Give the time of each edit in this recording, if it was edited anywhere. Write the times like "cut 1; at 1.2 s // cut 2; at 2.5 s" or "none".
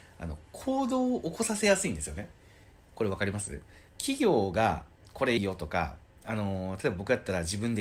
cut 1; at 3.9 s // cut 2; at 5.4 s